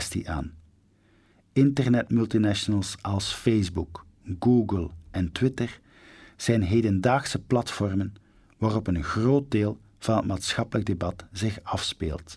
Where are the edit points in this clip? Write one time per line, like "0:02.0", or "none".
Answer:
none

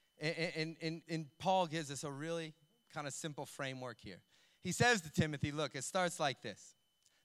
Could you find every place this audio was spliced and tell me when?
0:01.0

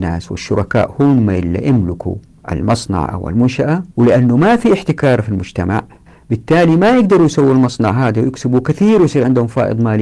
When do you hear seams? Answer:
0:03.9

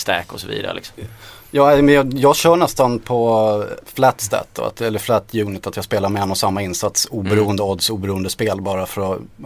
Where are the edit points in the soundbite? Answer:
0:03.8

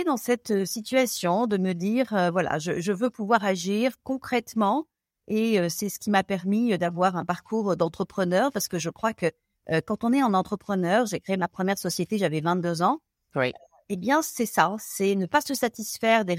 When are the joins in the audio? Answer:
none

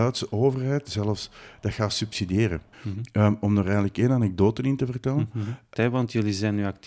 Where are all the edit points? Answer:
0:02.7
0:05.7

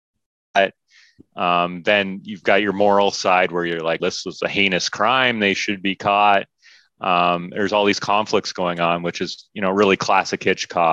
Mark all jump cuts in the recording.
0:04.0

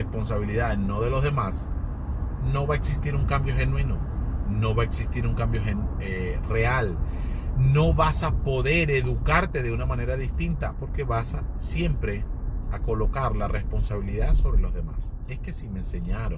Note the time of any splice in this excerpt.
0:10.7

